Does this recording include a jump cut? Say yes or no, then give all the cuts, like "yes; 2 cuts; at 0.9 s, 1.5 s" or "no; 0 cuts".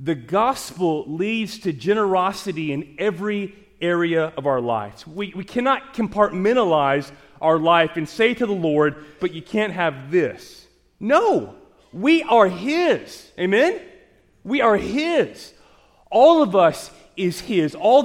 yes; 1 cut; at 9.2 s